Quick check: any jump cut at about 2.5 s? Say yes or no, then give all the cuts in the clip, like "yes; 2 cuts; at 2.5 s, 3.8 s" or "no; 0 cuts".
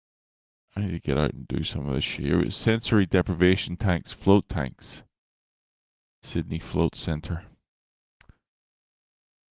no; 0 cuts